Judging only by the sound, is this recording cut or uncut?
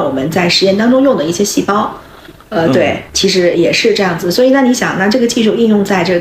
cut